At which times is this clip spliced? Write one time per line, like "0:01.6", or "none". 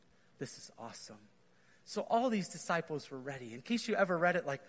none